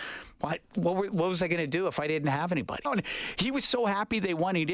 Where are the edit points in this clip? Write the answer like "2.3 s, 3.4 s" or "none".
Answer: 2.8 s